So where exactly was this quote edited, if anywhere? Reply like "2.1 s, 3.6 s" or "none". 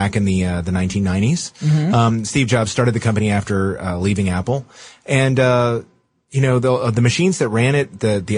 none